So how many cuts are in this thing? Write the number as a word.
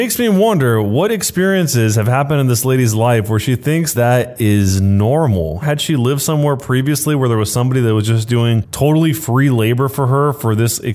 two